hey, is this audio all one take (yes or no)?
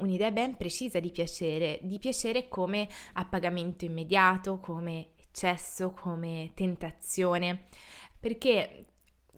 no